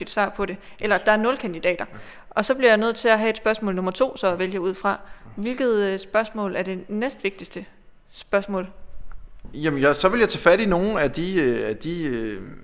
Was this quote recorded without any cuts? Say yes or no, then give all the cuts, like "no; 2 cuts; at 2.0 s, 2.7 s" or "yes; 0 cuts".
yes; 0 cuts